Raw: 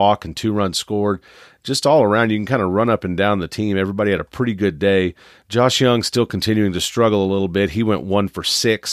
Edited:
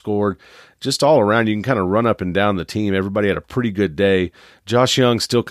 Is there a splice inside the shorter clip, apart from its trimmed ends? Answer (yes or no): no